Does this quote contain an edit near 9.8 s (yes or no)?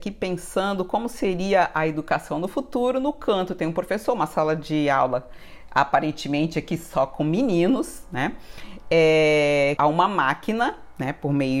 yes